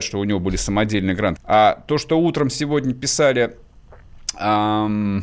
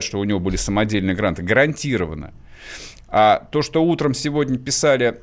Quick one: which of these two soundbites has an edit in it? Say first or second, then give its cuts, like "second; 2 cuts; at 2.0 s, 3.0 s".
first; 1 cut; at 1.4 s